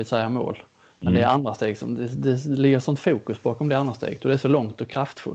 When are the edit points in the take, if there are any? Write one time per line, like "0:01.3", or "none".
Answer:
none